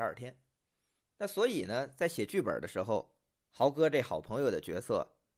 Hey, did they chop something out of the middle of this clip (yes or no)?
yes